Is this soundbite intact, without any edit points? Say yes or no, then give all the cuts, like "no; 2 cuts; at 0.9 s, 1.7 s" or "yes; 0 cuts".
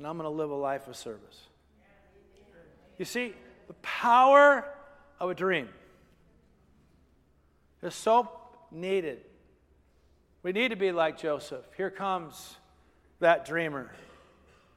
yes; 0 cuts